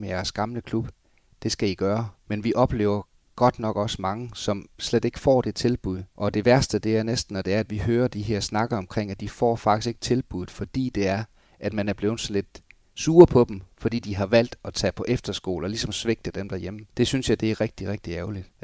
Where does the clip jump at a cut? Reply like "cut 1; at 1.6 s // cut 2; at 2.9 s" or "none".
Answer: none